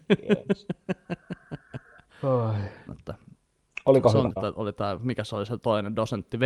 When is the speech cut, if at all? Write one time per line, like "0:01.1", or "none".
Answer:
0:02.9
0:04.3